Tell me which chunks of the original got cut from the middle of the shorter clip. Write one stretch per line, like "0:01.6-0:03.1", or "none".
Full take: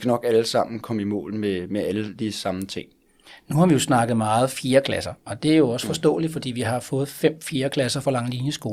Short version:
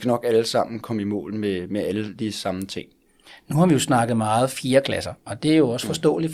none